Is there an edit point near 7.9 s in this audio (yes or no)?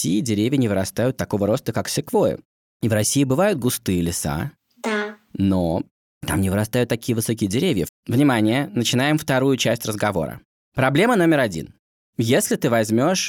yes